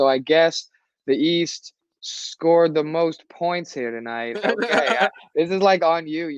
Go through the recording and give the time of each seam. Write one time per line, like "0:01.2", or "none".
0:04.3